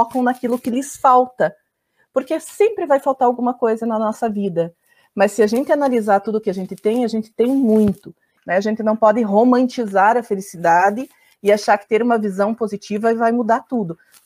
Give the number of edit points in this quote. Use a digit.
1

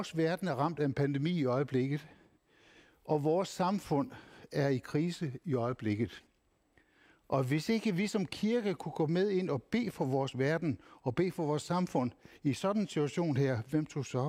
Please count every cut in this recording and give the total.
0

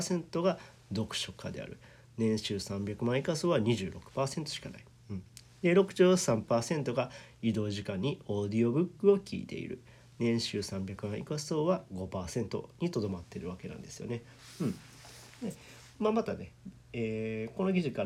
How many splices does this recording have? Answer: 0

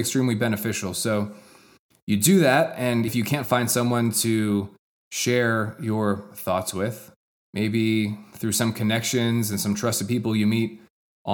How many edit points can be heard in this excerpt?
1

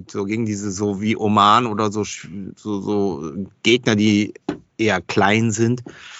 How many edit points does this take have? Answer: 0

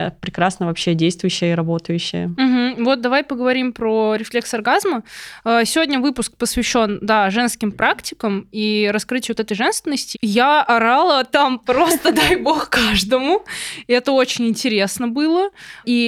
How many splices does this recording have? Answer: 1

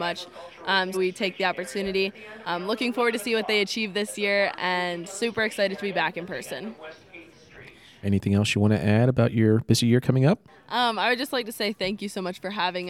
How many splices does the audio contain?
3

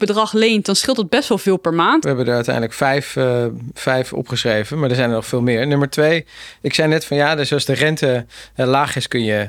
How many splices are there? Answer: 1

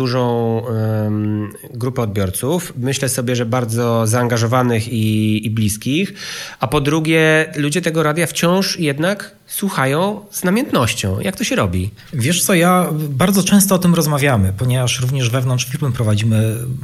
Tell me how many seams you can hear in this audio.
0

